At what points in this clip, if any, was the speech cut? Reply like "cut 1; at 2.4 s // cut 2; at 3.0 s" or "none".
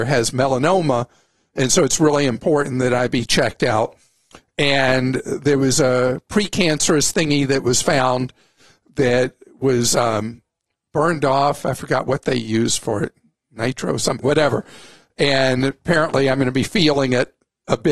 cut 1; at 14.2 s

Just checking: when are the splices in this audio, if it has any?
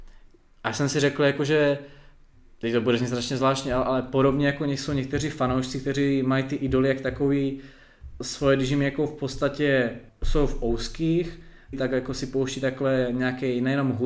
cut 1; at 10.1 s // cut 2; at 11.7 s

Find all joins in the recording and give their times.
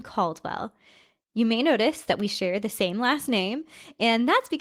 none

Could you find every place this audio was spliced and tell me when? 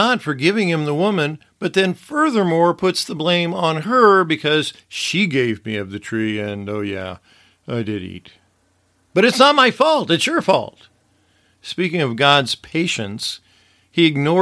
none

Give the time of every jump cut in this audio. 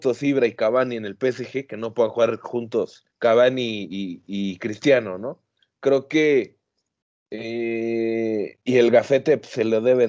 cut 1; at 3.1 s // cut 2; at 8.7 s

